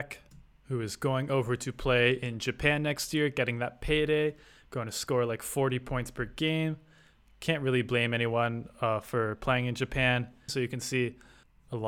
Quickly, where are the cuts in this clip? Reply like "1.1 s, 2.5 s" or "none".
10.5 s